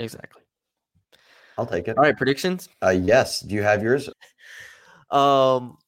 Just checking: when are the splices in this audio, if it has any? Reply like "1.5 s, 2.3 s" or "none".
2.7 s, 4.1 s